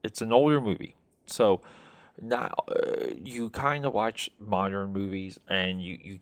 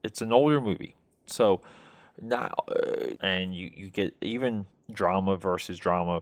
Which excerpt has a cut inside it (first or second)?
second